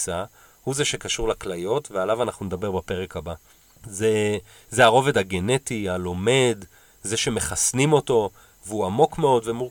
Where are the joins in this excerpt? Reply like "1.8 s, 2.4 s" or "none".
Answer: none